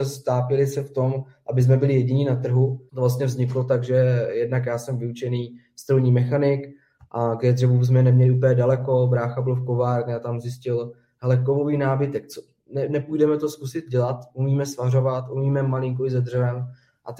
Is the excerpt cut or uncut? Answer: cut